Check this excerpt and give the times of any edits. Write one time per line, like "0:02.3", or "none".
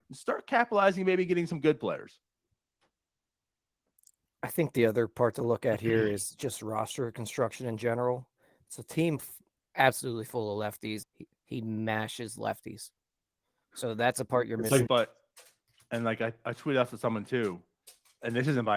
0:11.0
0:14.9